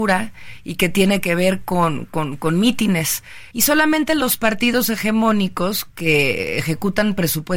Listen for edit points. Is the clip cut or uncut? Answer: cut